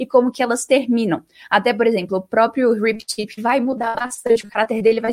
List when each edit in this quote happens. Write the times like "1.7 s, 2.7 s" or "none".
3.4 s